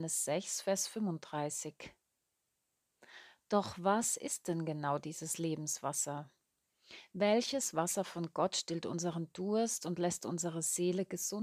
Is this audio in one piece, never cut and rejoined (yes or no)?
yes